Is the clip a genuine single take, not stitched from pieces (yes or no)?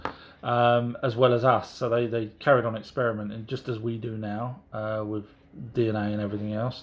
yes